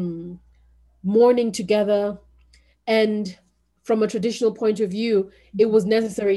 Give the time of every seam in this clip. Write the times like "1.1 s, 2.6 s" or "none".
none